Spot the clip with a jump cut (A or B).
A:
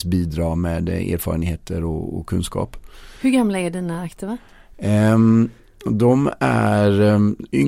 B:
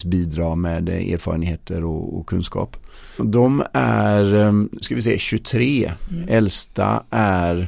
B